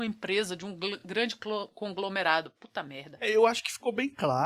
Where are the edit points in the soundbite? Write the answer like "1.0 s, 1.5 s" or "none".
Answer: none